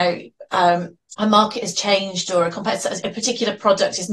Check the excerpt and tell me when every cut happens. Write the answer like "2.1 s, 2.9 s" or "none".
1.0 s, 3.0 s